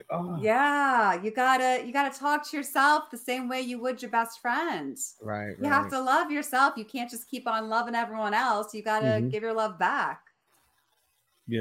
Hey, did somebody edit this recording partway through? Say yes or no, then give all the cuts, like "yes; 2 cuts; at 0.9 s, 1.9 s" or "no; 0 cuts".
no; 0 cuts